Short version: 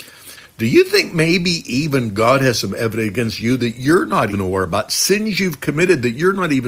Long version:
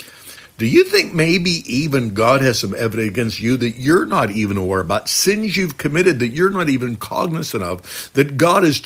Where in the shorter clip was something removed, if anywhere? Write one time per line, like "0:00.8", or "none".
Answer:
0:04.3